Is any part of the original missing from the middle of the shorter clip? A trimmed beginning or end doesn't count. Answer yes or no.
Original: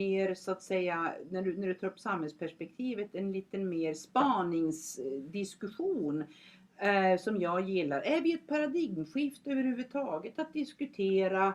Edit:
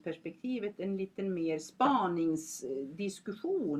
no